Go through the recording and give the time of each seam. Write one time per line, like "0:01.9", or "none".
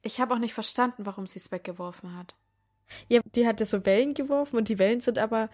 0:03.2